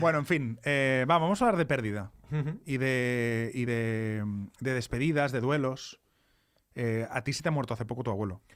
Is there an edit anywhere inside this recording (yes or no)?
no